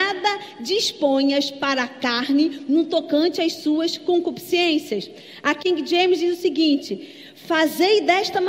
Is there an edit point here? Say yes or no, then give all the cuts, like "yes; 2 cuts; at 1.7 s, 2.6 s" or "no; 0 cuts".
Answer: no; 0 cuts